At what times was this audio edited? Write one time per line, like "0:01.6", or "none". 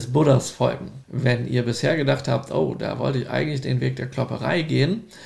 0:01.0